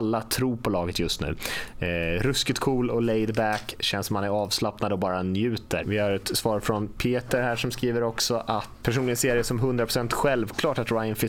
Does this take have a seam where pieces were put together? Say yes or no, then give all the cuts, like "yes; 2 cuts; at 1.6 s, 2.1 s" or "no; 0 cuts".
yes; 2 cuts; at 5.8 s, 8.8 s